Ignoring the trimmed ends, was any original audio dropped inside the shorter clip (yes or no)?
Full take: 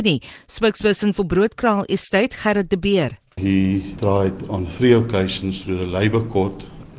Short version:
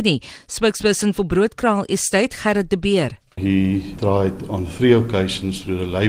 no